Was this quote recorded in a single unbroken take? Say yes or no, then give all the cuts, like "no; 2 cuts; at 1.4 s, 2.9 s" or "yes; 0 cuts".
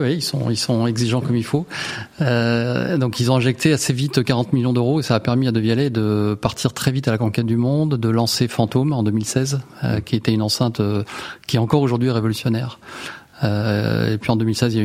yes; 0 cuts